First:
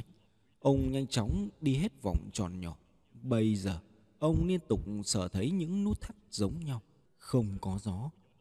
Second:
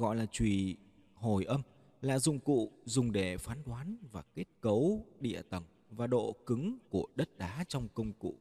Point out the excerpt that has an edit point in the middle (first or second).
first